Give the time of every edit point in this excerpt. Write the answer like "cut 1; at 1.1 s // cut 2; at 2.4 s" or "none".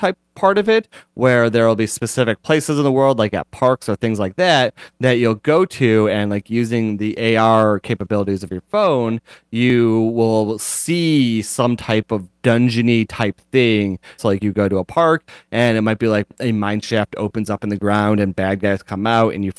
cut 1; at 14.2 s